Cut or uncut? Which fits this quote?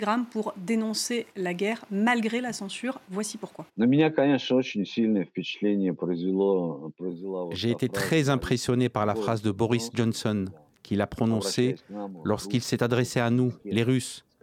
cut